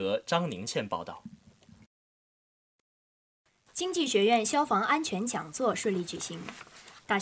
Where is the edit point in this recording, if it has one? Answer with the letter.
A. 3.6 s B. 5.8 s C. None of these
C